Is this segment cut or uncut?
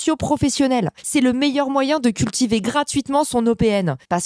uncut